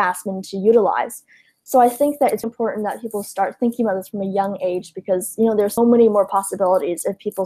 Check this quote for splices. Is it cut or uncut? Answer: cut